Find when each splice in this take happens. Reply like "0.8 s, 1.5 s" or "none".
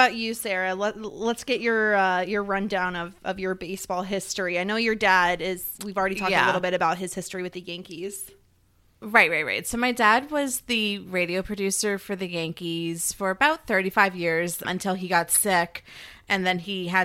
5.8 s, 14.6 s